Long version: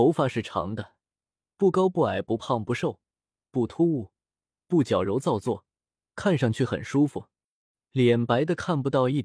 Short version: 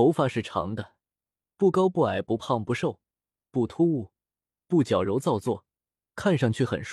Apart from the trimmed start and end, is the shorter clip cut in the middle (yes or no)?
no